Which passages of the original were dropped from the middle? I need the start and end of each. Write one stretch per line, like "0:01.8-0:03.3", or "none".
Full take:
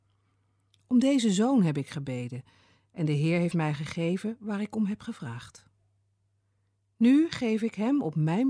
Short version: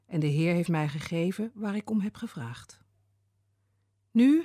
none